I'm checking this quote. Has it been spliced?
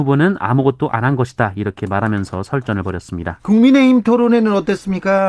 yes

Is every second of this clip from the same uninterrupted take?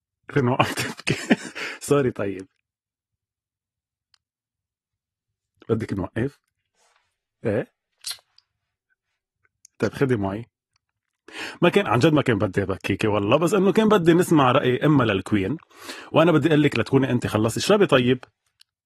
yes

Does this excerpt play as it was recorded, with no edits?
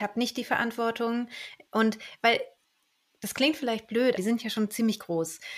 no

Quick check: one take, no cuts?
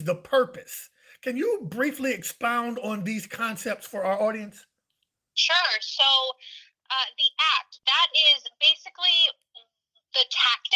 no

